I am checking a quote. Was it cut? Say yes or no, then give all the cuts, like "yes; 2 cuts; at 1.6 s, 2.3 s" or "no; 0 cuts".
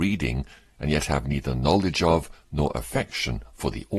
no; 0 cuts